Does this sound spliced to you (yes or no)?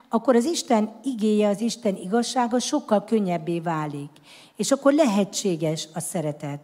no